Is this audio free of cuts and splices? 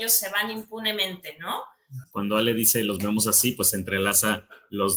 no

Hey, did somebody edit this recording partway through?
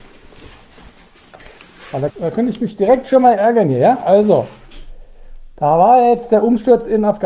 yes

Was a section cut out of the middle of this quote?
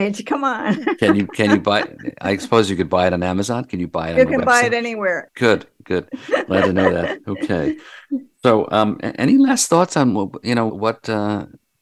yes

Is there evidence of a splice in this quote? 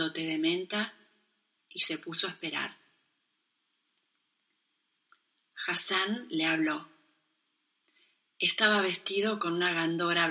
no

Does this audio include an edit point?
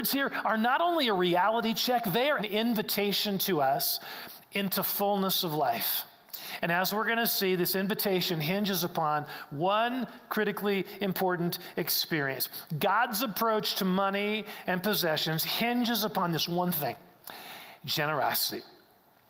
yes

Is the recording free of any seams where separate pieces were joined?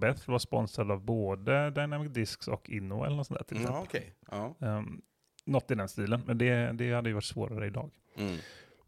yes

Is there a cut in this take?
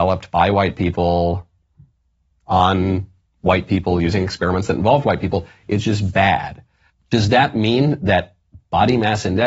yes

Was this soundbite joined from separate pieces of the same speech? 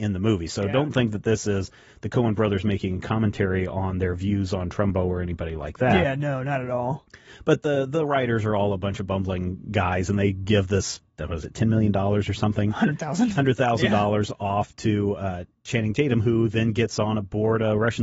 no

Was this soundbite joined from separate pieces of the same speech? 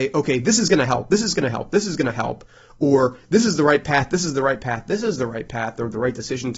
no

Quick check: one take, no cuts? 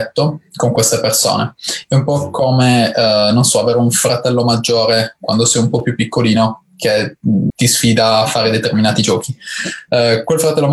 no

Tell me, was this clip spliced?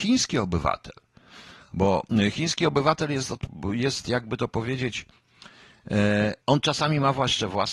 yes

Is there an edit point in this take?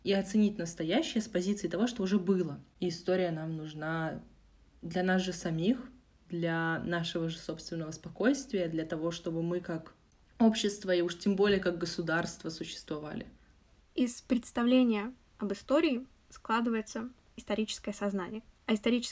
no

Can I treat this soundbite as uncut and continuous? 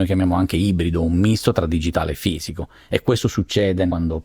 yes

